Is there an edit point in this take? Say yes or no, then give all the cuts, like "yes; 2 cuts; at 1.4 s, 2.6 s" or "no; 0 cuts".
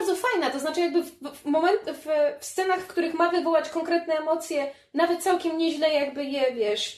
no; 0 cuts